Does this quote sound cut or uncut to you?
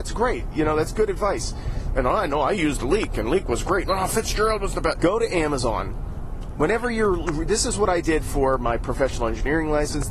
cut